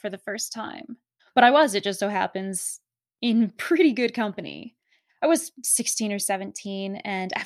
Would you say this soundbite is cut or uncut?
cut